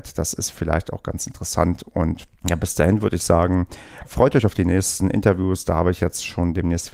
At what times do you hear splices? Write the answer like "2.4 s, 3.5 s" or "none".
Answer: 2.4 s, 4.0 s